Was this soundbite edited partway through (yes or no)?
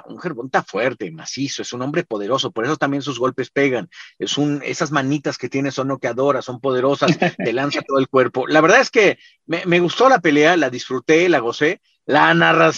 no